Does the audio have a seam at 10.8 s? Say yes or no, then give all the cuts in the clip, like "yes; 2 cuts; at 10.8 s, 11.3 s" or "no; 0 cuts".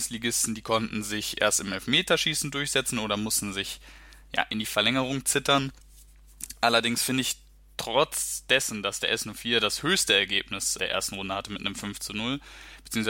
yes; 1 cut; at 10.8 s